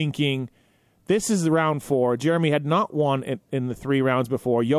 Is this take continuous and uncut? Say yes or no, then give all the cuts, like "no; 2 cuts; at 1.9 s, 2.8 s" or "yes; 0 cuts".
yes; 0 cuts